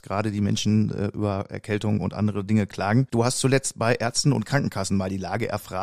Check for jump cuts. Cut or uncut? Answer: uncut